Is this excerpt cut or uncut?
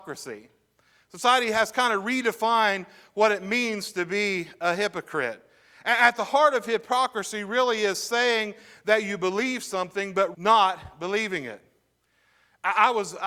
cut